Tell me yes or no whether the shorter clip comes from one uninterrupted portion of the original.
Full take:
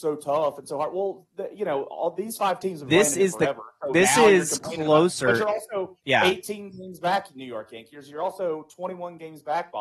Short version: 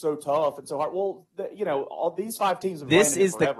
yes